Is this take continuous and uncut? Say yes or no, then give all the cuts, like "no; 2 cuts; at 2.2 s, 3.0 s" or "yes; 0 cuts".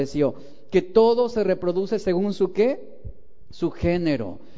yes; 0 cuts